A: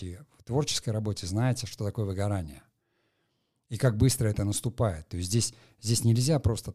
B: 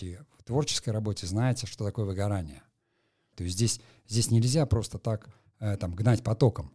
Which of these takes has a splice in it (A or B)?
B